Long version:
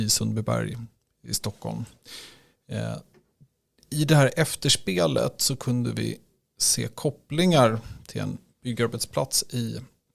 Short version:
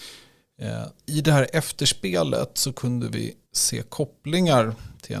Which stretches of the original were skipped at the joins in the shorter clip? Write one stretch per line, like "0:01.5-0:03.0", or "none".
0:03.1-0:03.8
0:06.3-0:06.5